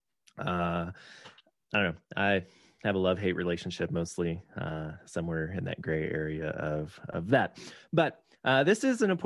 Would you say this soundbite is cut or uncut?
uncut